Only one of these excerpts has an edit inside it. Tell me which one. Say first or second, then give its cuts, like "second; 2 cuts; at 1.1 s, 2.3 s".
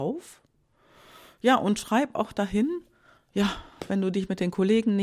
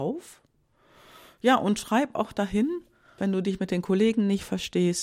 second; 1 cut; at 3.2 s